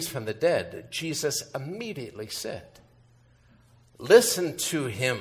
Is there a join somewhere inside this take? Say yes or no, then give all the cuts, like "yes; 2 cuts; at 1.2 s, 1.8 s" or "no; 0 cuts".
no; 0 cuts